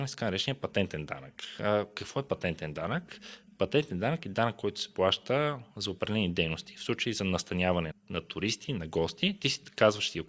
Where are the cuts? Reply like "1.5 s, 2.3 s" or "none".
7.9 s